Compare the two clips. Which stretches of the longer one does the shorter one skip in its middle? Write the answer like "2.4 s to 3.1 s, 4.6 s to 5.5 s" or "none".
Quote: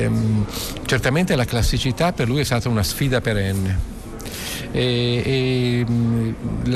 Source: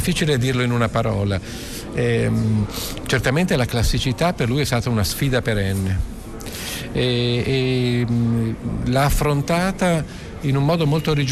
none